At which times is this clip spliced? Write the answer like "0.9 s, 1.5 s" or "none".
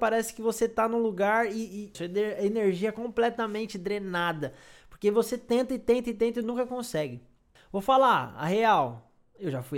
1.9 s, 7.6 s